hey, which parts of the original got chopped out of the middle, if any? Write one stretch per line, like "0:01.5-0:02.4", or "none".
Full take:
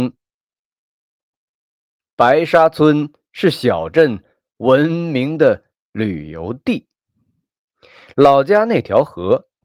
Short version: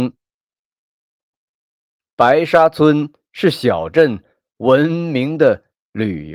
none